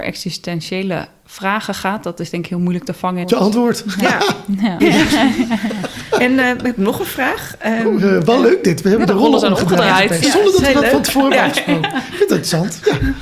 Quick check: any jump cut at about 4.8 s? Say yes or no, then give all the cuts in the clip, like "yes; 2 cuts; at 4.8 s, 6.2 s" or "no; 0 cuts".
yes; 2 cuts; at 3.2 s, 4.8 s